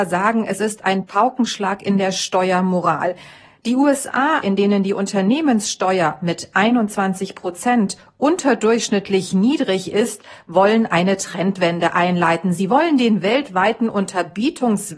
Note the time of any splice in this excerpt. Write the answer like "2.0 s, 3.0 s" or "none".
4.4 s